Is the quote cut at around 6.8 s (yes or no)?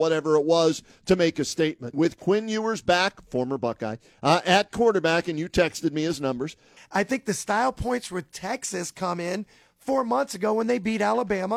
yes